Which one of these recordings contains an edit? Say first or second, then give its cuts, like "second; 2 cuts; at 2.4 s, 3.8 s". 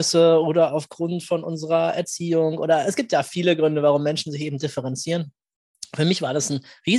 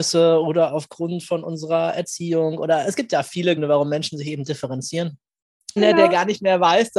second; 2 cuts; at 3.6 s, 5.8 s